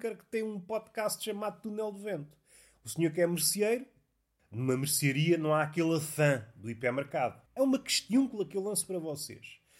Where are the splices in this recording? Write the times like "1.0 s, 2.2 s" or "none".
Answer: 7.5 s